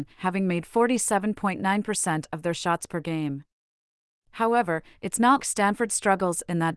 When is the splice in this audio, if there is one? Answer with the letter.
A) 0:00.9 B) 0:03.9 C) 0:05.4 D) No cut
C